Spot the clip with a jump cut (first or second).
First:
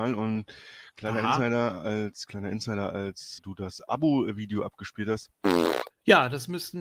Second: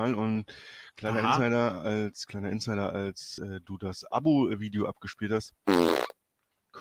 first